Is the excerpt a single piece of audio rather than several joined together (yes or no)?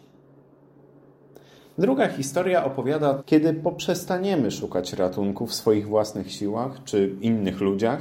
no